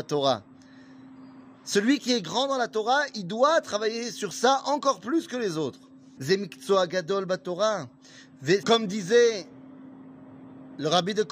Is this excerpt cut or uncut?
cut